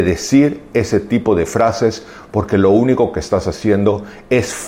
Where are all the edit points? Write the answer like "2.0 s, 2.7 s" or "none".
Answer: none